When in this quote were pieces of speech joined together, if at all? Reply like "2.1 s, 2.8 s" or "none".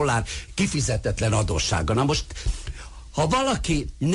none